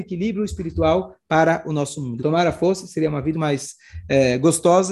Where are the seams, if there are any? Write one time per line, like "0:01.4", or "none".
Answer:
0:02.2
0:03.3